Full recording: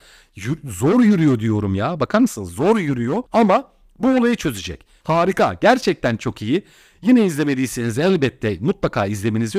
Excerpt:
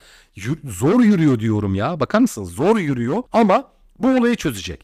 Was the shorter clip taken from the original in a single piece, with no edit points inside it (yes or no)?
yes